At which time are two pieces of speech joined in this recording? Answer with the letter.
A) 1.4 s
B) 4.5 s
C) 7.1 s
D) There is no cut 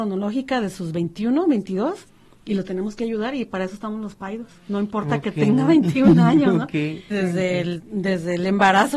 C